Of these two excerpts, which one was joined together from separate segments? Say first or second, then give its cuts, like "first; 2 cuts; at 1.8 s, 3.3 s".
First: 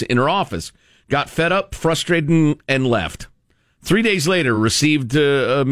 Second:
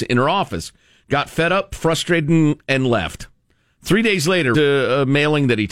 second; 1 cut; at 4.5 s